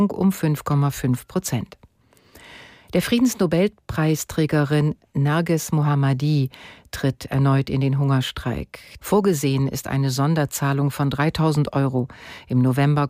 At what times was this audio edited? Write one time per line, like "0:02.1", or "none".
0:09.0